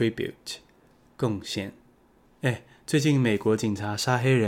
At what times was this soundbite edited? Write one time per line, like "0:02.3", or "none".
0:02.3